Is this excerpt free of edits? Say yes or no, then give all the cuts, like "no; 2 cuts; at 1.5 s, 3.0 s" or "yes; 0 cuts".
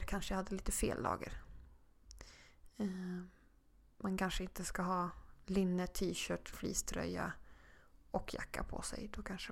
no; 1 cut; at 6.5 s